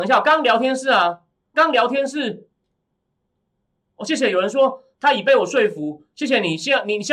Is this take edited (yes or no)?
yes